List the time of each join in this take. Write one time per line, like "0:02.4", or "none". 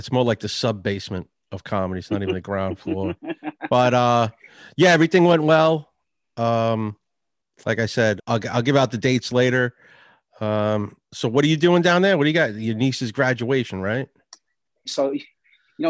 0:08.2
0:14.9